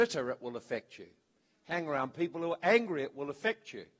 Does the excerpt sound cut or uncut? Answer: uncut